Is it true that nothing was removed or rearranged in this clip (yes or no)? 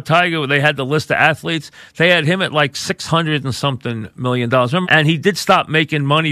no